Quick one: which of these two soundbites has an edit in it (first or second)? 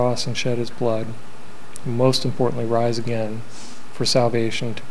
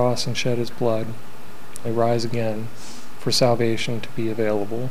second